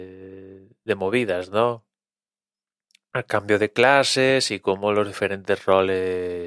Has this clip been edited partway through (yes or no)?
no